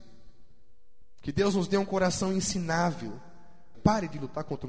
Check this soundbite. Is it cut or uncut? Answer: cut